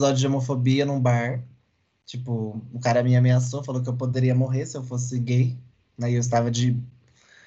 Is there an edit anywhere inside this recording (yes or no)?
no